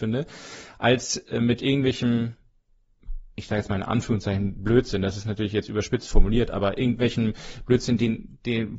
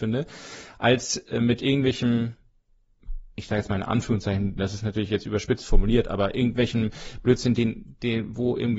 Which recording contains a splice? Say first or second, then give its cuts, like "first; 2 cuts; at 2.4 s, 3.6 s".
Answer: second; 1 cut; at 4.6 s